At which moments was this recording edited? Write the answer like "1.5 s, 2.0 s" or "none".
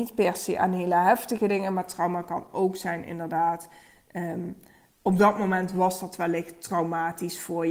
none